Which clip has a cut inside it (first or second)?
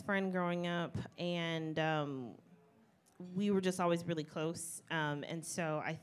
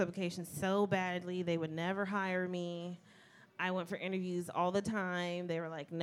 first